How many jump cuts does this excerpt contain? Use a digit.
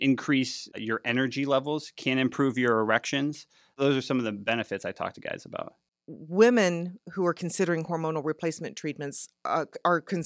0